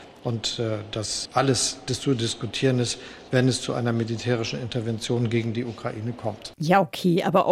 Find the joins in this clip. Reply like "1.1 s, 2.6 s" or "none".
1.3 s